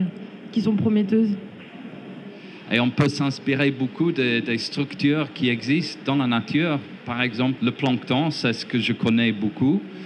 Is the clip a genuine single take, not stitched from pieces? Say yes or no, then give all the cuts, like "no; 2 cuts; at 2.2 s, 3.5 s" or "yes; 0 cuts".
no; 1 cut; at 7.6 s